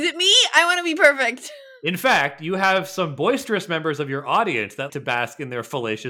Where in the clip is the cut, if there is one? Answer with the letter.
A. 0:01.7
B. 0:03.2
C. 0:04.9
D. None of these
C